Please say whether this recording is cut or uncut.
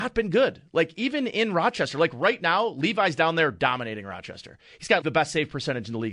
cut